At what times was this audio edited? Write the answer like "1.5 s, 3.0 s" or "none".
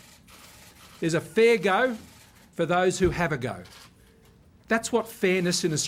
none